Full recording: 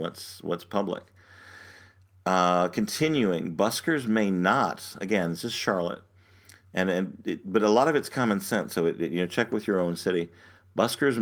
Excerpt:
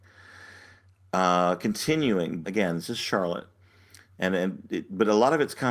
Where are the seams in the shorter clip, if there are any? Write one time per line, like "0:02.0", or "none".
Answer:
0:02.4